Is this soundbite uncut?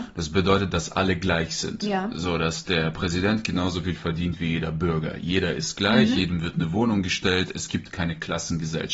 yes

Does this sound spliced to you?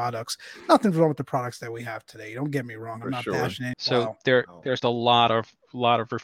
yes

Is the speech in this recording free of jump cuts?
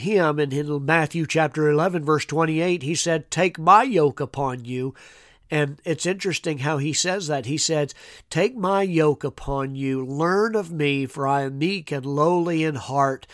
yes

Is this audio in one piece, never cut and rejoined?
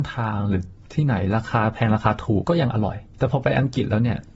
no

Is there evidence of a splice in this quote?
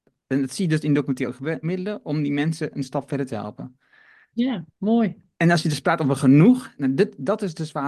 yes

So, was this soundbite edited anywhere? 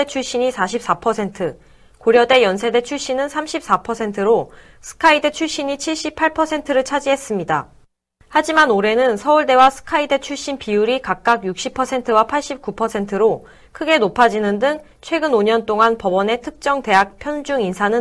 no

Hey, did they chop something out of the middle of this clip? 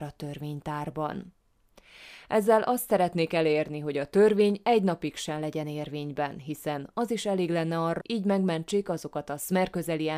yes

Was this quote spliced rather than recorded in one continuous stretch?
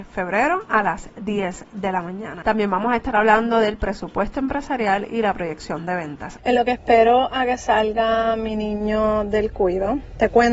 yes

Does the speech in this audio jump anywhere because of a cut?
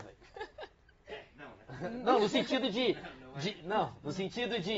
no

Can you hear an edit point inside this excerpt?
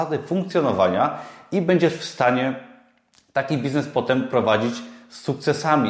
no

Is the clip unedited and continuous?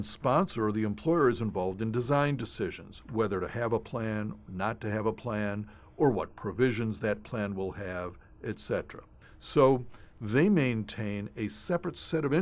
yes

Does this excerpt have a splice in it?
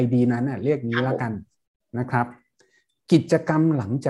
no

